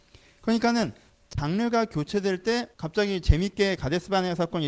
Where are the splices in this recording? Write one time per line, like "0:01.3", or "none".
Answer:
0:02.7

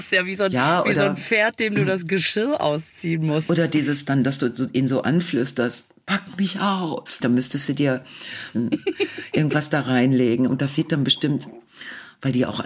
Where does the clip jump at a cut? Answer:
0:07.2
0:08.5

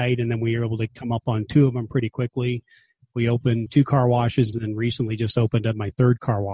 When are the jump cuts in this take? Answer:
0:04.5

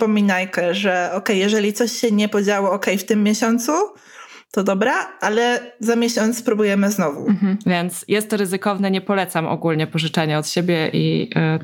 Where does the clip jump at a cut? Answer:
0:07.6

